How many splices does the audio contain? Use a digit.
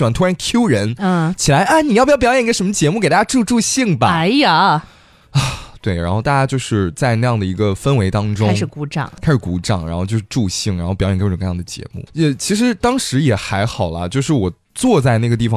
1